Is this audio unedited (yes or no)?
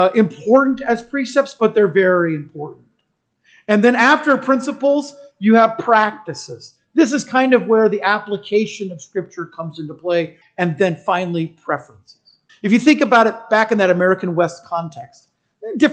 no